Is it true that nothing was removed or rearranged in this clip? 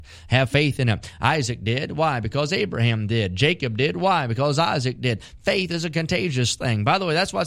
yes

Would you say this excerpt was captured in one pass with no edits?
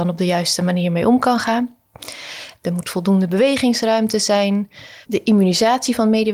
no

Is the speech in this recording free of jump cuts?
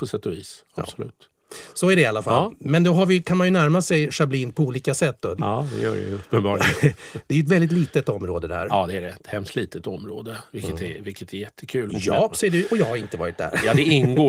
no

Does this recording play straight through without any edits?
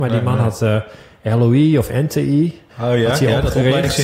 no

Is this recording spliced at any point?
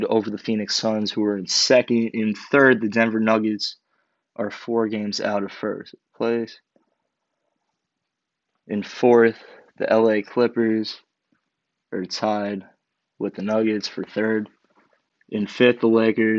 yes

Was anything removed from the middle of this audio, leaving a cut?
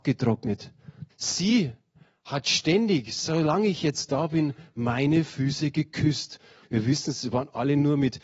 yes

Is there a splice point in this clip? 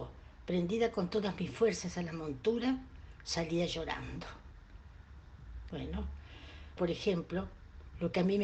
yes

